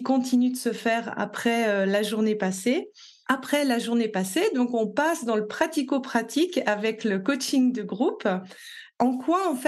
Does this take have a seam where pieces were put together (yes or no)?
no